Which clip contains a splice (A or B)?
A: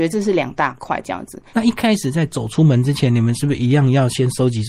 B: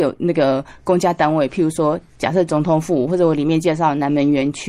A